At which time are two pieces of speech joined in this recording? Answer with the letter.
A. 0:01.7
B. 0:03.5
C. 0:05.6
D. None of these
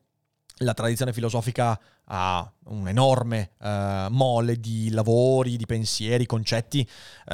D